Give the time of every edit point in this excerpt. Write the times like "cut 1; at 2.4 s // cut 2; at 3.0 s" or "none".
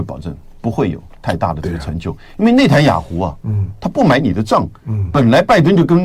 cut 1; at 1.2 s